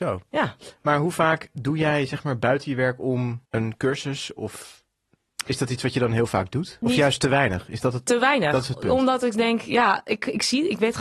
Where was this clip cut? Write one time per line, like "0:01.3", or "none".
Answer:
0:03.5
0:06.8